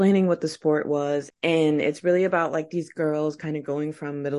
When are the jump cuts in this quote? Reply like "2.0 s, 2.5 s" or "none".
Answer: 1.3 s